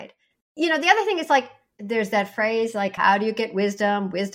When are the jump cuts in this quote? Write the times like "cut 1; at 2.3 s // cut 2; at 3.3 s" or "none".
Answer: none